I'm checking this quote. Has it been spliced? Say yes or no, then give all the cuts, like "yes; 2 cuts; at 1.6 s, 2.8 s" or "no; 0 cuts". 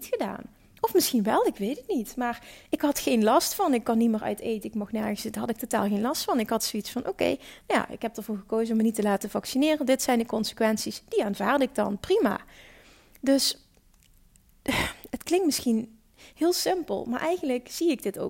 no; 0 cuts